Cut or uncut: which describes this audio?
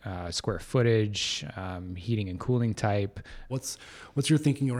cut